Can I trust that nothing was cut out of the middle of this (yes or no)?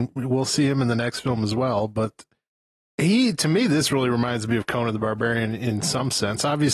yes